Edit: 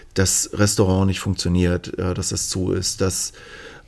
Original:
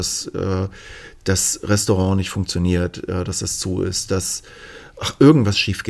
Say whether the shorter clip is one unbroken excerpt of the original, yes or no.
yes